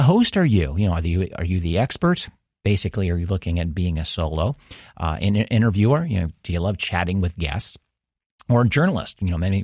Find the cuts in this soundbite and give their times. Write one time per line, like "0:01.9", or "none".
none